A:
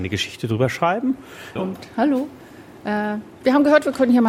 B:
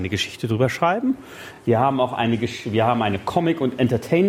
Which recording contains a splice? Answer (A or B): A